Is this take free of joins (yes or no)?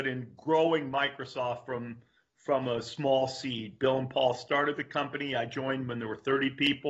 yes